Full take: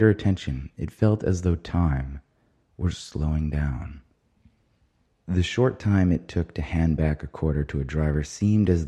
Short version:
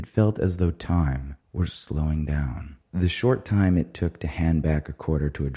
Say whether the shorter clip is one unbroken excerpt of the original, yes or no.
no